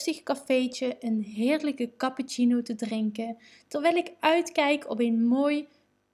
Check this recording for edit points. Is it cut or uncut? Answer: uncut